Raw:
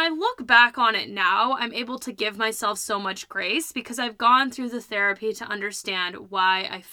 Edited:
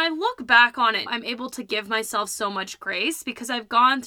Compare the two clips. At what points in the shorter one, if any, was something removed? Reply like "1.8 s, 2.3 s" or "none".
1.1 s